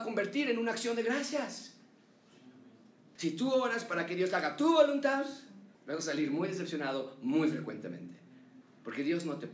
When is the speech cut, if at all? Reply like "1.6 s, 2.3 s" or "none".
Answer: 3.2 s, 5.7 s